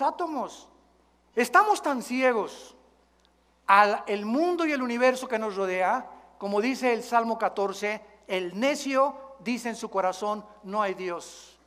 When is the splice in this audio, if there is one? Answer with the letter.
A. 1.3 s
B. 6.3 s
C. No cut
A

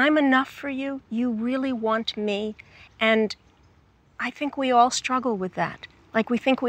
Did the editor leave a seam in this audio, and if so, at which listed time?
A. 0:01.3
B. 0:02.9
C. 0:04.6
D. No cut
D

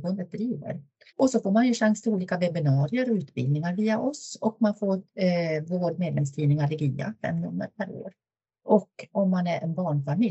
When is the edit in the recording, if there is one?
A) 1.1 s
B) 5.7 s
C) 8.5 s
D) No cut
A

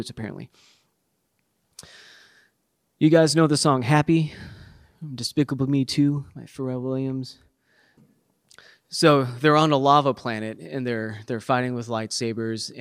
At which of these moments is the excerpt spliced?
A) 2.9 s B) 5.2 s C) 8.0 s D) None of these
C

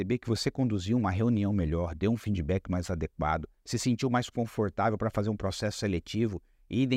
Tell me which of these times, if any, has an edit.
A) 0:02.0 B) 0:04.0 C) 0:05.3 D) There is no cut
D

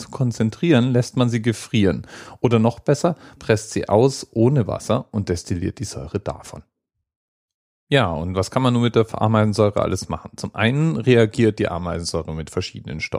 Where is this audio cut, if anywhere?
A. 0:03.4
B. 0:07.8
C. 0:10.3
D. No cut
A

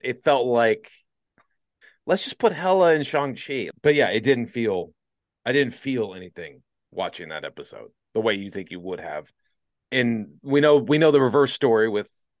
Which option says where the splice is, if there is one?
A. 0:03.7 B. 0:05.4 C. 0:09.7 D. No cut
A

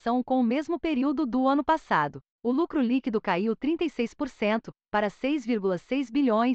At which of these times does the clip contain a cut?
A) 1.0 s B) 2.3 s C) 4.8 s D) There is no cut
B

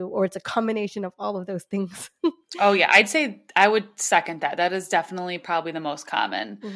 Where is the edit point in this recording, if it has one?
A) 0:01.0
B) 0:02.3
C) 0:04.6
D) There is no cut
D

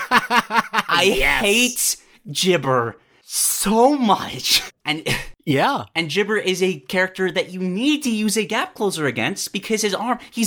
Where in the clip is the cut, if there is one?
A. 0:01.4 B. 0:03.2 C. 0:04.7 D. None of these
C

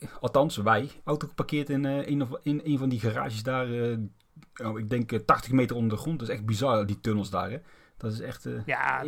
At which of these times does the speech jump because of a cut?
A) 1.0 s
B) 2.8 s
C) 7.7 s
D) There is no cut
A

